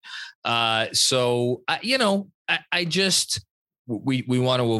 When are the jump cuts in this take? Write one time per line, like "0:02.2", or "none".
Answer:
0:03.8